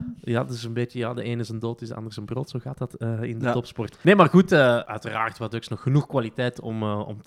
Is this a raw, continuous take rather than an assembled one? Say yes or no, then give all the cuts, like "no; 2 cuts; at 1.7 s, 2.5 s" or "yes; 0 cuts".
yes; 0 cuts